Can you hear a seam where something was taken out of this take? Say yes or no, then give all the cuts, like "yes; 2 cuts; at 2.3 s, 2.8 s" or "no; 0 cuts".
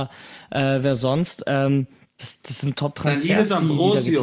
no; 0 cuts